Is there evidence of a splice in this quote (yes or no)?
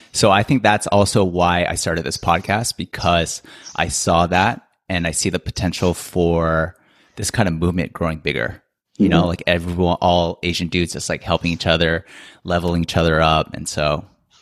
no